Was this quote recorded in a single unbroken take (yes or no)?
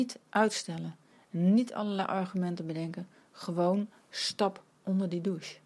yes